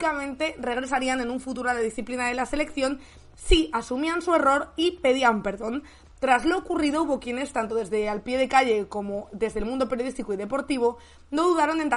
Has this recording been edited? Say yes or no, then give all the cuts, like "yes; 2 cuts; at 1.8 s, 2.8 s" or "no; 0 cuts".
no; 0 cuts